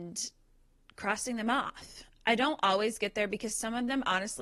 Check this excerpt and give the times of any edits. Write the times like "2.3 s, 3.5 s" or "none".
none